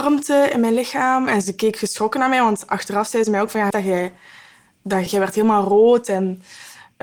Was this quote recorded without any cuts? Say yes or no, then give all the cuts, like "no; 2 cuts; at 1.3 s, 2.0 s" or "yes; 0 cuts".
no; 3 cuts; at 1.3 s, 3.7 s, 5.1 s